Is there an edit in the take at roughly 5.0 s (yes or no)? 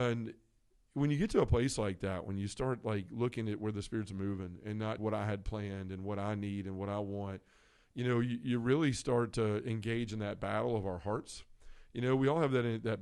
yes